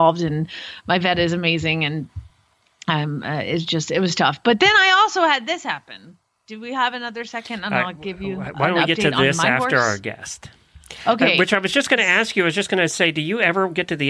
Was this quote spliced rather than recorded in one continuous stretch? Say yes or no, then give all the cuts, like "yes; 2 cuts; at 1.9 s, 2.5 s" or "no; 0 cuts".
no; 0 cuts